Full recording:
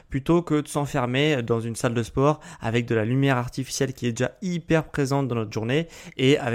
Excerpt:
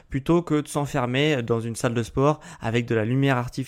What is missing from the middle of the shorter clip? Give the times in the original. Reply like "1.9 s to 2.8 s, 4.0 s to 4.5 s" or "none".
none